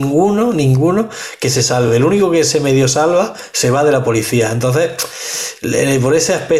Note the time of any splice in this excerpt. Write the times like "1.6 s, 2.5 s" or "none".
none